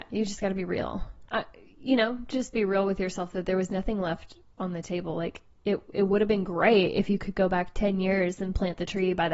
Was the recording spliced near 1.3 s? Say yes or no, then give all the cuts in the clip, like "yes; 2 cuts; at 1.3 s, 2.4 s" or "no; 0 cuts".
yes; 1 cut; at 1.3 s